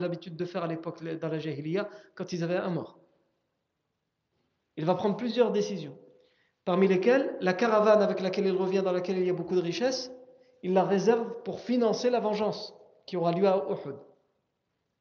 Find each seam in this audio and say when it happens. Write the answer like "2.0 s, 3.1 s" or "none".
4.6 s